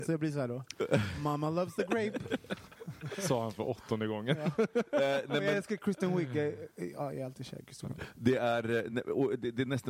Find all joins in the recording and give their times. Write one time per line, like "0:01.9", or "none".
none

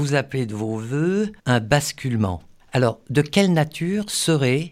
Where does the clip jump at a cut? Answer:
0:01.4

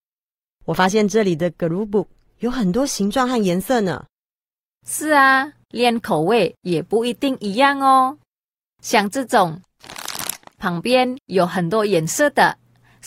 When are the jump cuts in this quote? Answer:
0:05.6

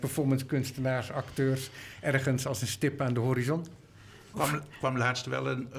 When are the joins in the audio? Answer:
0:04.3

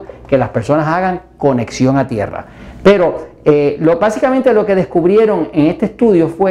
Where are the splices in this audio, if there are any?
none

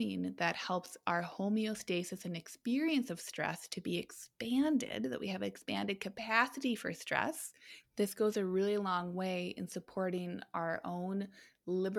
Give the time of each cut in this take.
0:07.8

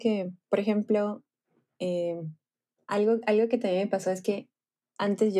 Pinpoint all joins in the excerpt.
none

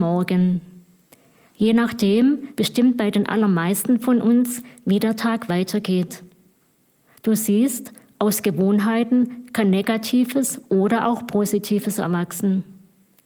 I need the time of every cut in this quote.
0:02.5
0:07.2

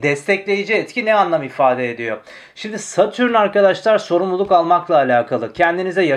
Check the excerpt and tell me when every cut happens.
none

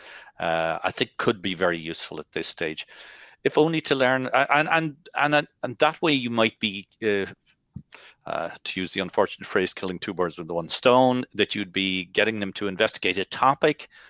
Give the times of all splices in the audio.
none

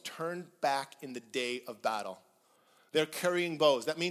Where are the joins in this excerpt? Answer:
none

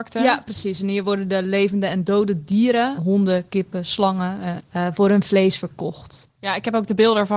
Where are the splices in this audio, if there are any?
0:03.0
0:04.6

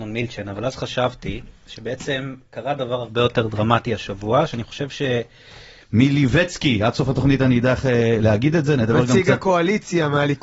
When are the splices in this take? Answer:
0:05.8

